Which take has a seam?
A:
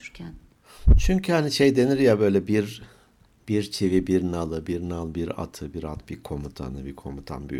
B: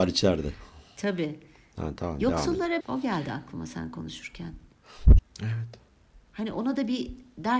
B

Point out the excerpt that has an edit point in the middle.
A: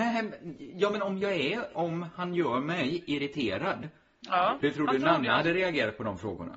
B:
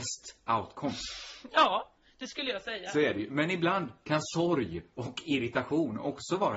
A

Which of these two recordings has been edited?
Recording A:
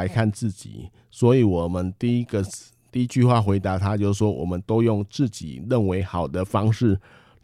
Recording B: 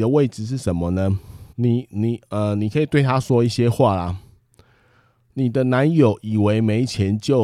B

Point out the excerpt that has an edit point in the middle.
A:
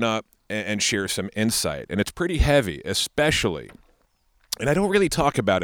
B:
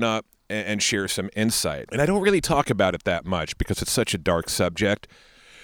B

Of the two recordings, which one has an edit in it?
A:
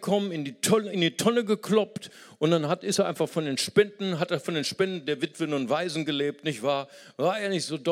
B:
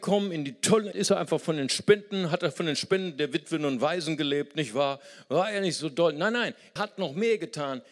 B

